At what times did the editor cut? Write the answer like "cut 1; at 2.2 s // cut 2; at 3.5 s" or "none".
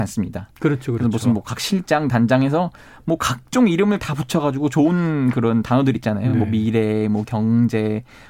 none